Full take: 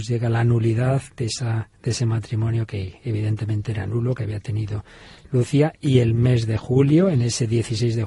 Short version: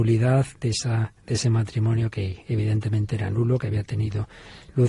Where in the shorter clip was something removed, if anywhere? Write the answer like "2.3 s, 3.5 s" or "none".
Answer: none